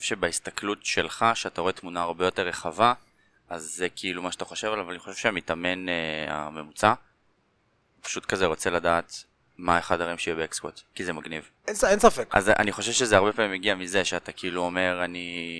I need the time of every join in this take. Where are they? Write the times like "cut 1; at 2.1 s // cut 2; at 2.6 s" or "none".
cut 1; at 11.6 s